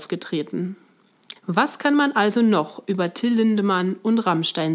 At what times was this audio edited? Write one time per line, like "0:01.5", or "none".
0:01.4